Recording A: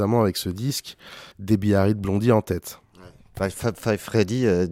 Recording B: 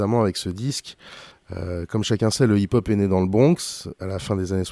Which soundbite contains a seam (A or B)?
A